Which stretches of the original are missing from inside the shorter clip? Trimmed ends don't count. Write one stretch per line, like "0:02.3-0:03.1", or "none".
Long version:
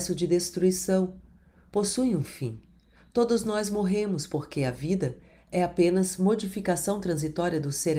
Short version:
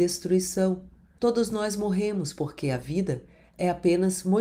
0:01.5-0:03.1

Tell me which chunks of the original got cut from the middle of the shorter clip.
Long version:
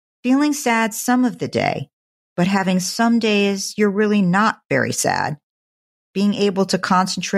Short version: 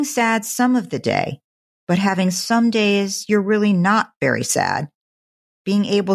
none

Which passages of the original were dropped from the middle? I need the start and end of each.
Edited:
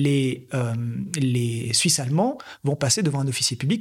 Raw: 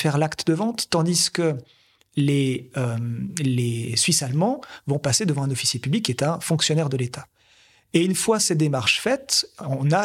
none

